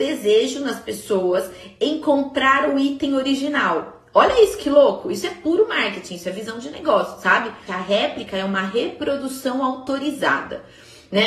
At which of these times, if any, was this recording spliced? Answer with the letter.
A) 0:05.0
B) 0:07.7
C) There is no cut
B